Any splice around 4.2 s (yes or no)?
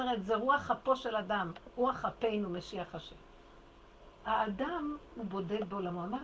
yes